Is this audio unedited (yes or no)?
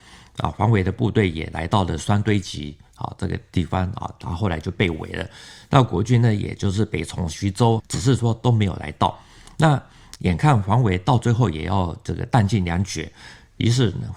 no